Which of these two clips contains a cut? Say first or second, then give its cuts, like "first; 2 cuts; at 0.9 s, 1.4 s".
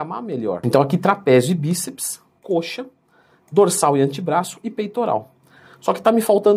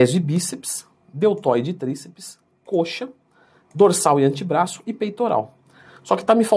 first; 1 cut; at 2.4 s